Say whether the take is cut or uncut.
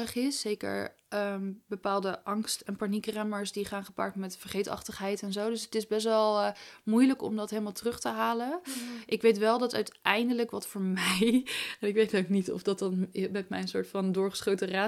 uncut